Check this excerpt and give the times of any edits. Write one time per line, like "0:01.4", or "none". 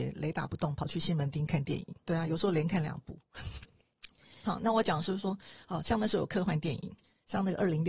0:02.0